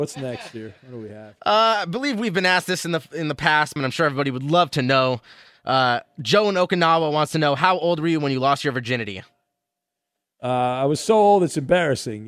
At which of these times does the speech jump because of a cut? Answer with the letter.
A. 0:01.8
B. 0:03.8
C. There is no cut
B